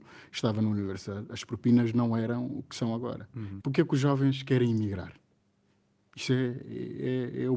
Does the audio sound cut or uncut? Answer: cut